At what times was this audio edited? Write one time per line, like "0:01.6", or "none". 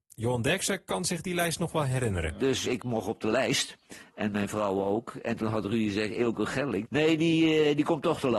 0:02.6
0:06.8